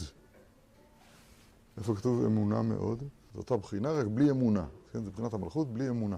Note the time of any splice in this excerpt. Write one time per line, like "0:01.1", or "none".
0:03.3